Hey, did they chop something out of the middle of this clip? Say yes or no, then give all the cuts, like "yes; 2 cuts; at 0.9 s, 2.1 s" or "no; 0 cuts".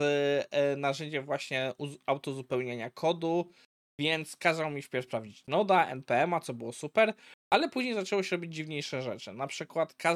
yes; 1 cut; at 3.9 s